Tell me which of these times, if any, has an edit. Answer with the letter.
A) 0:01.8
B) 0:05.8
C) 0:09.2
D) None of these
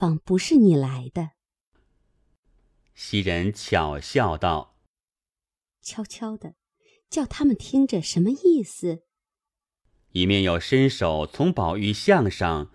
A